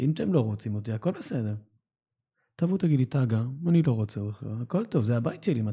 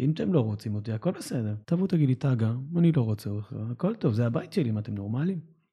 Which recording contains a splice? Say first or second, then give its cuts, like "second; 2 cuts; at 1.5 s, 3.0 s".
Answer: second; 1 cut; at 1.6 s